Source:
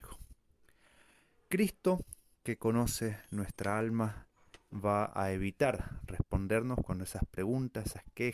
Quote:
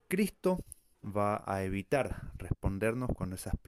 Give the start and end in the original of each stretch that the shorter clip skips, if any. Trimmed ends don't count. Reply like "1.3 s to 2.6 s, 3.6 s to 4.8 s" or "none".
2.4 s to 4.6 s